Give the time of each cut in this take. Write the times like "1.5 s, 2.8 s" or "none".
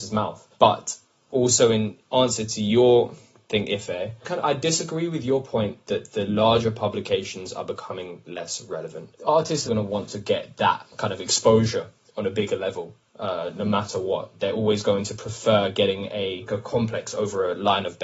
9.7 s, 16.5 s